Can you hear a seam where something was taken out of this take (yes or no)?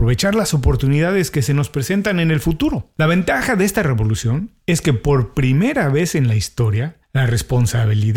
no